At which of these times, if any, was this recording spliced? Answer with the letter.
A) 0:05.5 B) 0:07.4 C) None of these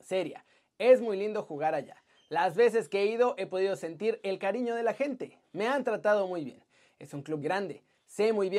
B